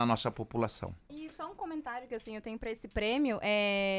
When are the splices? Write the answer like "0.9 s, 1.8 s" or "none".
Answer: 1.1 s